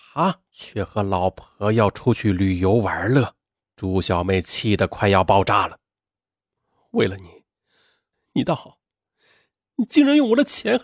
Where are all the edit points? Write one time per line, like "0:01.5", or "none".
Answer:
0:08.1

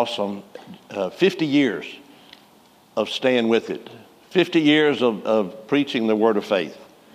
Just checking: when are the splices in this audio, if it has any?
none

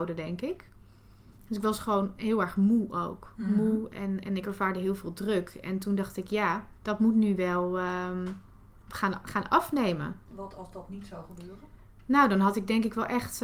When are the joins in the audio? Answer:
0:06.8
0:10.2

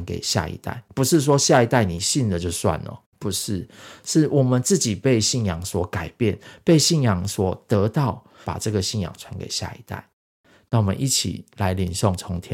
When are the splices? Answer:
0:08.4

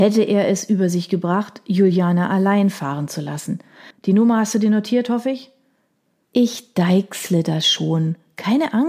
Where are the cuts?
0:03.9
0:06.3

